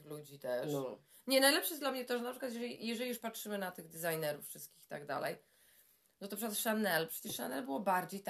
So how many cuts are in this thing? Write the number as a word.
zero